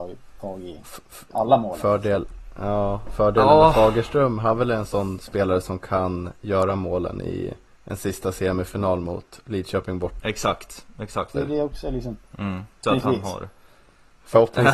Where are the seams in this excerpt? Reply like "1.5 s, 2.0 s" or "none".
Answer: 10.2 s, 11.3 s, 12.8 s